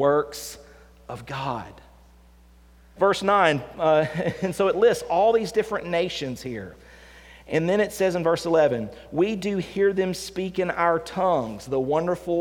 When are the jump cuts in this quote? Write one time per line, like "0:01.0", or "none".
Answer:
0:03.0